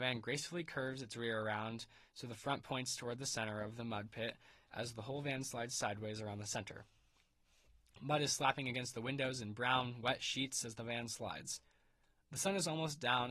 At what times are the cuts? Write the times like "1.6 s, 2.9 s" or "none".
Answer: none